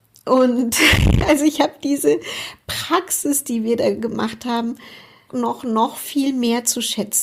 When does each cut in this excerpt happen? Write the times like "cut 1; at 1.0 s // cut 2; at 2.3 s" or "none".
cut 1; at 5.3 s